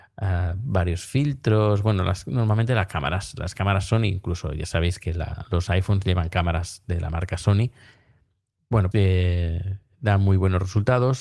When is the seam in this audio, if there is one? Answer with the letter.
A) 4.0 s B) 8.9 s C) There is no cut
B